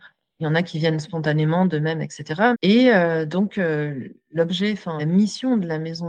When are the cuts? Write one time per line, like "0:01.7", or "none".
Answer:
0:02.5
0:05.0